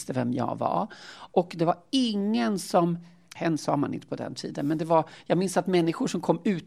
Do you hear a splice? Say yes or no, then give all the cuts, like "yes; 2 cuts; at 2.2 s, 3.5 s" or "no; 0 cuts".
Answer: yes; 1 cut; at 3.4 s